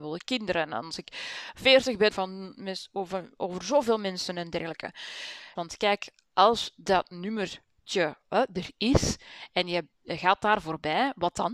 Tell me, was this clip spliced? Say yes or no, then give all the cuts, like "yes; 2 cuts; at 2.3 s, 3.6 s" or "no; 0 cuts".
yes; 2 cuts; at 2.1 s, 5.6 s